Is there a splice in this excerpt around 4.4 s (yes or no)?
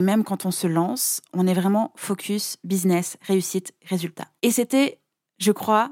yes